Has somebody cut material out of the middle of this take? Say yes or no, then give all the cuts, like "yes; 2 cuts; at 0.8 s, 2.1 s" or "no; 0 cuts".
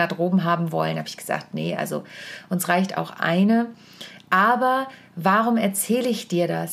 no; 0 cuts